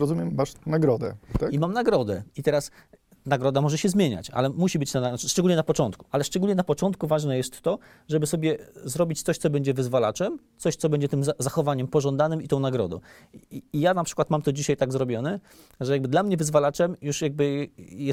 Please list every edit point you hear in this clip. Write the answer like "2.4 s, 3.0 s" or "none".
6.1 s